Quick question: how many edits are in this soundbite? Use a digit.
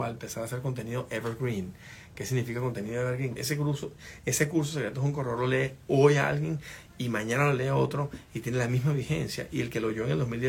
1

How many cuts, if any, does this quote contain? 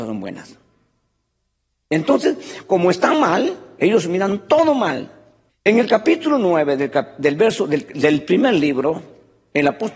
1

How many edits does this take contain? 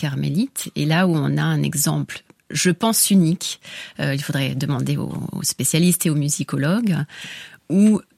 0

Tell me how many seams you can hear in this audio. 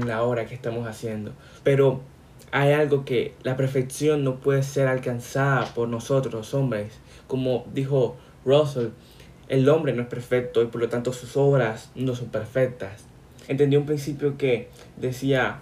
2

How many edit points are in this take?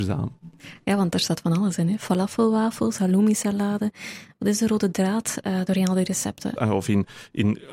2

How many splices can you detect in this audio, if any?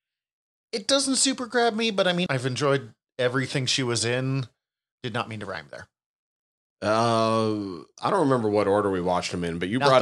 2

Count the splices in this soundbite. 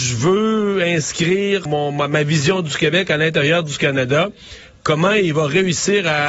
1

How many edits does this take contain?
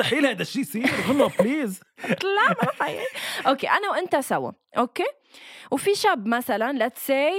0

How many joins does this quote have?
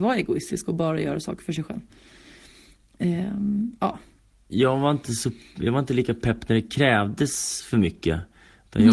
1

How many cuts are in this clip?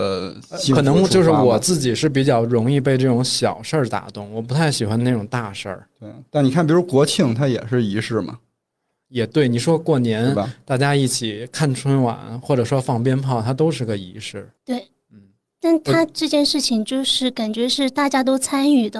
1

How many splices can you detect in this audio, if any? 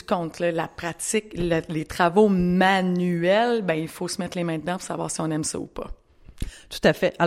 0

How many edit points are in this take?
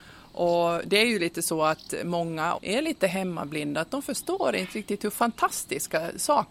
1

